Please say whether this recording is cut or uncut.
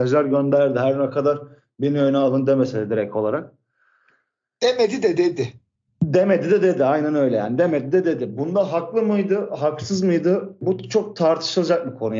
uncut